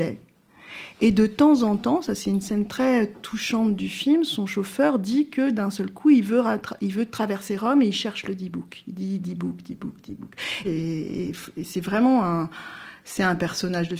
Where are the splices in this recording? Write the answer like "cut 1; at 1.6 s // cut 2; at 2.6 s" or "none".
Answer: cut 1; at 10.6 s